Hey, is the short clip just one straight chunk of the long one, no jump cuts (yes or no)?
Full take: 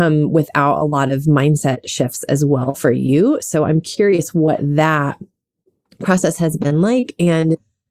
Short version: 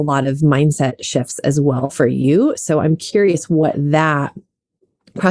yes